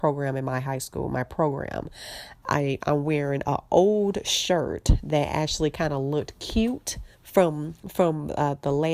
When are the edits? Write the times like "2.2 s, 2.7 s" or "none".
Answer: 2.4 s, 7.1 s